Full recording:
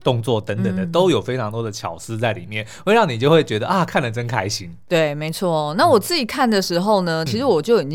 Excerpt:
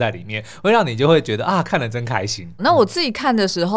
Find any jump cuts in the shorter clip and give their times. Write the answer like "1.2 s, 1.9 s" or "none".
2.6 s